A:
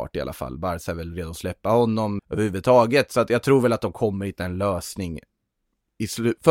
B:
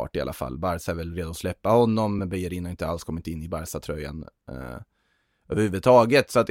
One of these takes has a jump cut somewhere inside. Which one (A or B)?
A